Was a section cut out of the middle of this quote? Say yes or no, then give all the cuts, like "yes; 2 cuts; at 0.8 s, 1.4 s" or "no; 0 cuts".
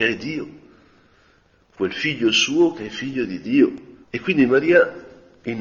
yes; 1 cut; at 4.0 s